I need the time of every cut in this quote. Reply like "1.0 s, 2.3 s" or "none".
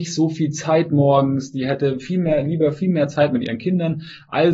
none